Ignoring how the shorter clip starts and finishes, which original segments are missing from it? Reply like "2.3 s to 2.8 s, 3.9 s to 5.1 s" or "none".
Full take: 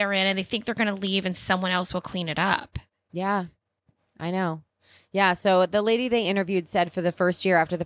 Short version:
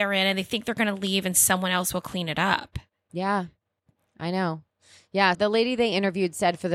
5.3 s to 5.7 s